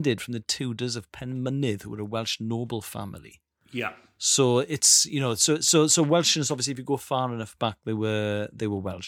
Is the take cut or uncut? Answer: uncut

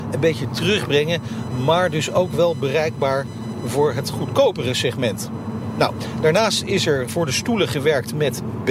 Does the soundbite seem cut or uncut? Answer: cut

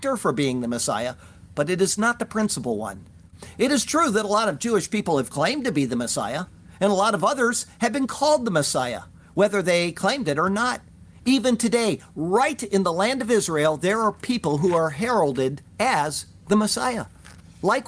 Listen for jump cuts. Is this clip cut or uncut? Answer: uncut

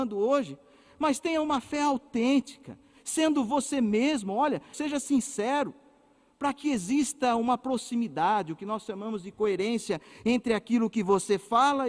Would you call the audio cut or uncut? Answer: cut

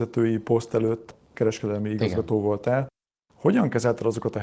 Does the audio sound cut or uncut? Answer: uncut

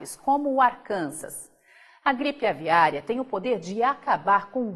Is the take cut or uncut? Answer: uncut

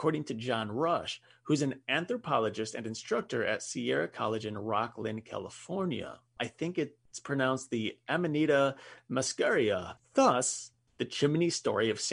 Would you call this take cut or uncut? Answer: cut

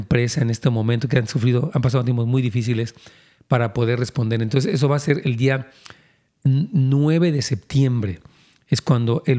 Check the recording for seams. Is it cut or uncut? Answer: uncut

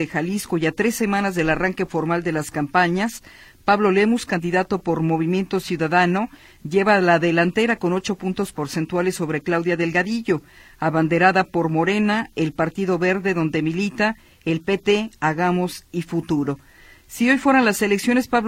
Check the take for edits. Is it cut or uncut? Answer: uncut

